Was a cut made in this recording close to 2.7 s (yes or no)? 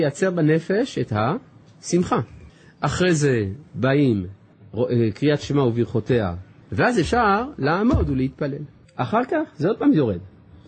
no